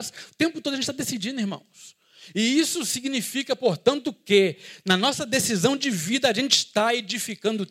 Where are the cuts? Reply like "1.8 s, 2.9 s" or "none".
none

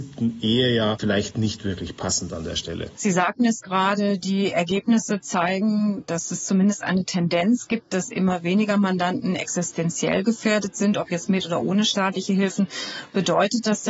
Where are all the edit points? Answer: 2.9 s

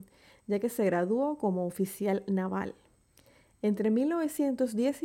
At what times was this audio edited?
none

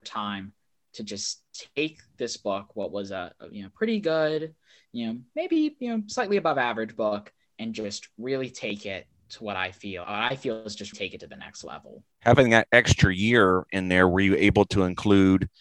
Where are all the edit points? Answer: 10.9 s, 12.1 s

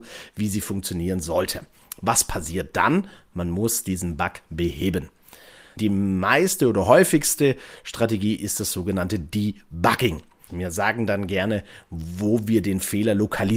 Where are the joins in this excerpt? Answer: 5.8 s, 10.5 s

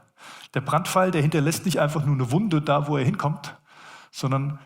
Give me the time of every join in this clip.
none

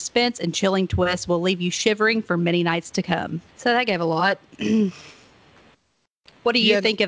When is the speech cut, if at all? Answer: 3.5 s

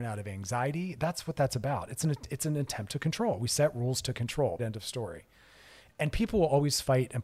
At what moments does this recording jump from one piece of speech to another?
4.6 s

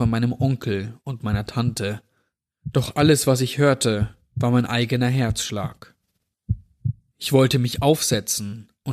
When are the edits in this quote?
none

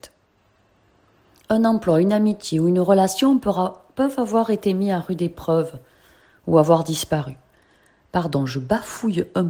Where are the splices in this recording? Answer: none

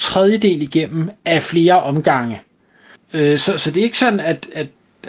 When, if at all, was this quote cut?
3.0 s

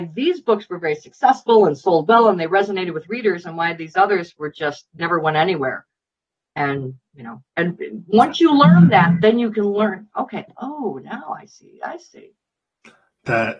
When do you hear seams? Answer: 7.5 s

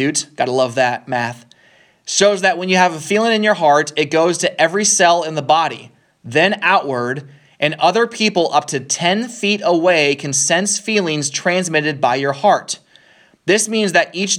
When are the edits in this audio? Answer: none

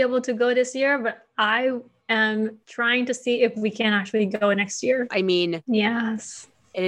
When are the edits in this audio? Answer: 2.6 s, 5.1 s

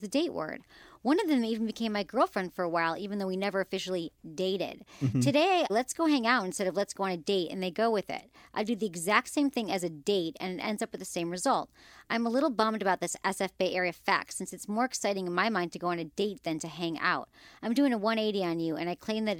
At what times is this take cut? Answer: 5.7 s

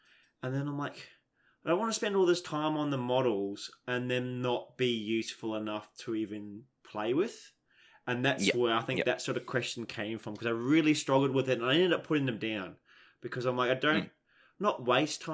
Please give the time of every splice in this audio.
none

